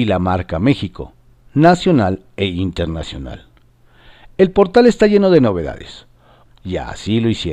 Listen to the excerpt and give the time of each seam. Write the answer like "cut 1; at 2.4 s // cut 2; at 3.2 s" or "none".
cut 1; at 6.5 s